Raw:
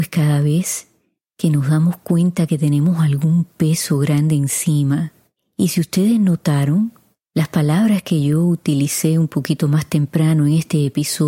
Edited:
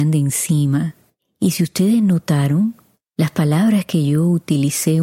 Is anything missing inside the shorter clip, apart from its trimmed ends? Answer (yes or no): no